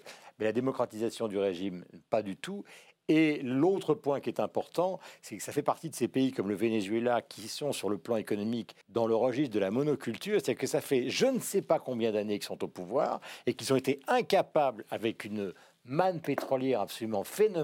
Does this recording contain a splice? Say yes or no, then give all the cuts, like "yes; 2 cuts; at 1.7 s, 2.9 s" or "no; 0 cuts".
yes; 1 cut; at 8.8 s